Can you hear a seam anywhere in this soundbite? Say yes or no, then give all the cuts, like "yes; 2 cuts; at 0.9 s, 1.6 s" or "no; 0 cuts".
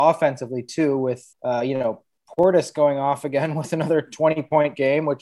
yes; 1 cut; at 1.3 s